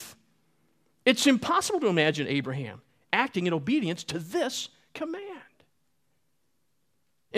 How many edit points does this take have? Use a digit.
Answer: 0